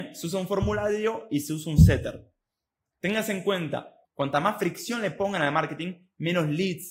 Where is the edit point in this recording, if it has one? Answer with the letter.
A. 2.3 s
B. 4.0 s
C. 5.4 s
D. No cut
B